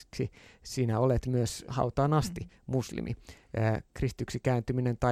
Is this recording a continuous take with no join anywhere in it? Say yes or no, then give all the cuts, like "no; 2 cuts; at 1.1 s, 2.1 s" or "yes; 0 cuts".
no; 1 cut; at 1.7 s